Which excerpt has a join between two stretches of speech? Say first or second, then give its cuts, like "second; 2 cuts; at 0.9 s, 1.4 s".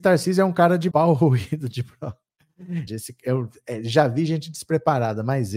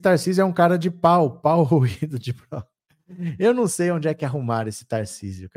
first; 2 cuts; at 0.9 s, 2.9 s